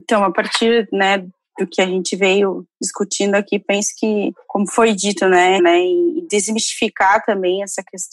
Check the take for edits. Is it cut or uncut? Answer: cut